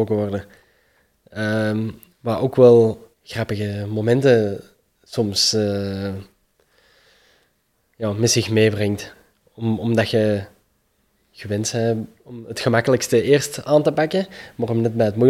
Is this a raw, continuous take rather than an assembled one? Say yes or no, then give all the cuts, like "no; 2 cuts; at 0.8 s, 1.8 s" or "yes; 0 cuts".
no; 1 cut; at 3.1 s